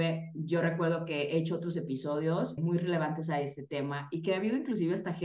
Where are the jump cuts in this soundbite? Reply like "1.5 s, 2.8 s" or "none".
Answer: 2.6 s